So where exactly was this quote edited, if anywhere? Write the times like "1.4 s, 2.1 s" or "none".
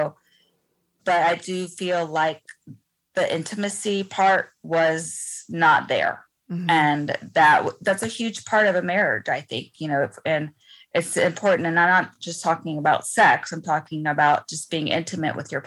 none